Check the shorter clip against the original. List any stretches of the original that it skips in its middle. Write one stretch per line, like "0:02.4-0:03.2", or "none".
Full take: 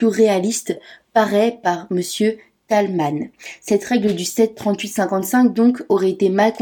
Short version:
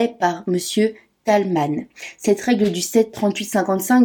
none